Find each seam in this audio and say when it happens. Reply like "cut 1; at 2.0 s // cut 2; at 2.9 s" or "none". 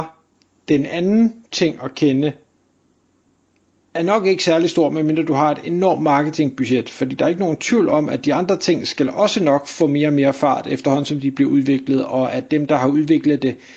none